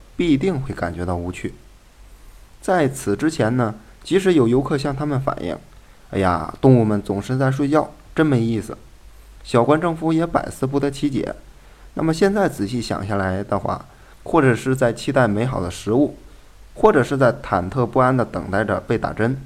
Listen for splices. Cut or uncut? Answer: cut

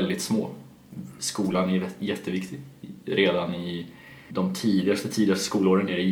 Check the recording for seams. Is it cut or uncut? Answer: cut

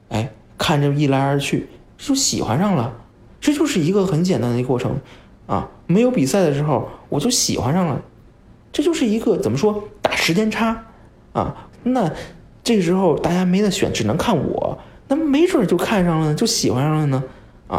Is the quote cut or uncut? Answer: cut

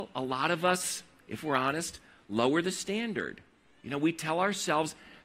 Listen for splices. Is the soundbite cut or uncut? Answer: uncut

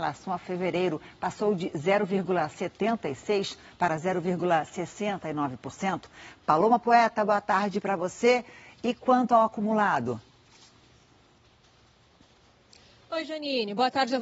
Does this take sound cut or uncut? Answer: uncut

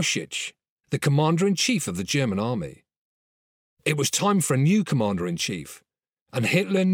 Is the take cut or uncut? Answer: uncut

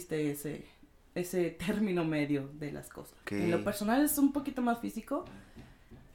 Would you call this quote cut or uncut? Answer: cut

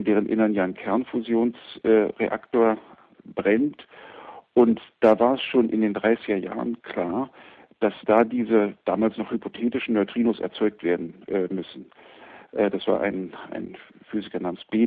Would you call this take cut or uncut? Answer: uncut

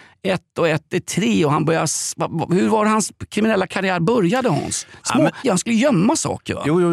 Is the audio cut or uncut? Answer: cut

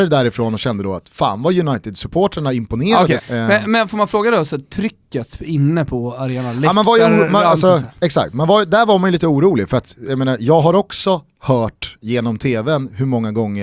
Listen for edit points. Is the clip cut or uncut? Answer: cut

